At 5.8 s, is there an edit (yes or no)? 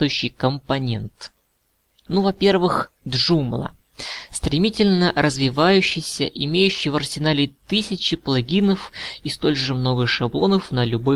no